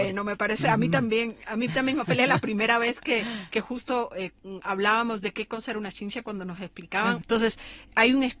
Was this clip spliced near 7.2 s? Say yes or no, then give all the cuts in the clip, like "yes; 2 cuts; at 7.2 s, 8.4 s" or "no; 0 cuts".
yes; 1 cut; at 7.2 s